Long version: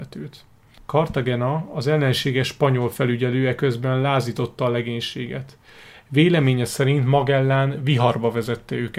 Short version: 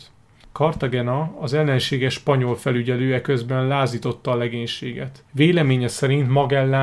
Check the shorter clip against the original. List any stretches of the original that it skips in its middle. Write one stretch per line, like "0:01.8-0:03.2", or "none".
0:05.6-0:06.0